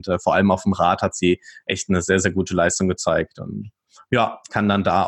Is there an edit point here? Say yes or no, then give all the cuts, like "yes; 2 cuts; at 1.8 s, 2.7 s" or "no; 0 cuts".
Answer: no; 0 cuts